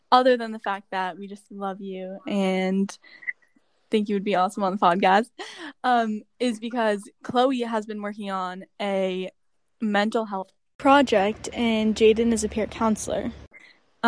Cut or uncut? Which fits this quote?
uncut